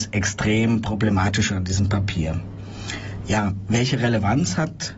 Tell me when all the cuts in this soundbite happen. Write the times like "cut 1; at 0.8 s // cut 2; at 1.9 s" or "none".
none